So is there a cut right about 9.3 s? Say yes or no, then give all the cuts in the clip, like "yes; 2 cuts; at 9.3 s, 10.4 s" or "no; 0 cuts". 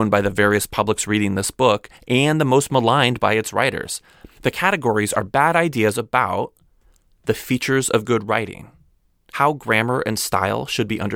yes; 2 cuts; at 4.4 s, 9.3 s